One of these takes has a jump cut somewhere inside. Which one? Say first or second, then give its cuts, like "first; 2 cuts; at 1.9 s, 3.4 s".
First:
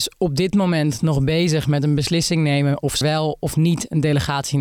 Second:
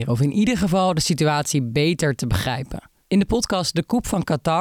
first; 1 cut; at 3.0 s